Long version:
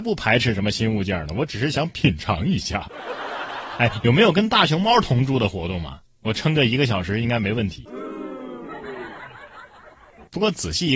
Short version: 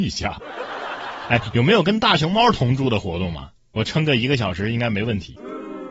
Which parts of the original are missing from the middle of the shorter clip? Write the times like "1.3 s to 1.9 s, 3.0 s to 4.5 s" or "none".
none